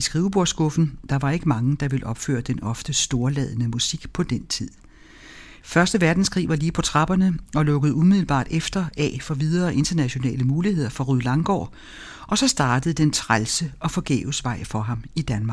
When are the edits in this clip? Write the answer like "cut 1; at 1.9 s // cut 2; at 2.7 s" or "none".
cut 1; at 5.6 s